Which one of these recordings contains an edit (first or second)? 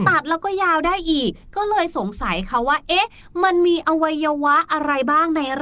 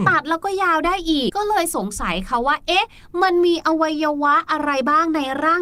second